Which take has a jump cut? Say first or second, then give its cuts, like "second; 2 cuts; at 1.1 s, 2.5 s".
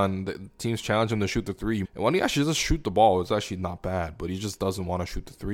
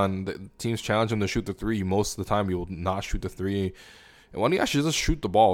first; 1 cut; at 1.8 s